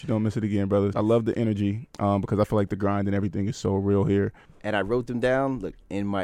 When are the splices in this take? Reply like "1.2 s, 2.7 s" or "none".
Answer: 0.9 s, 4.5 s